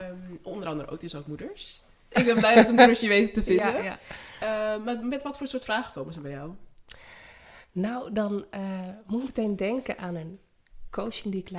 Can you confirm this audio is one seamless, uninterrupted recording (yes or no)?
no